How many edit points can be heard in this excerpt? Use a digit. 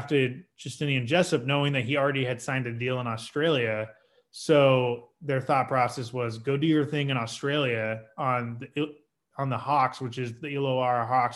0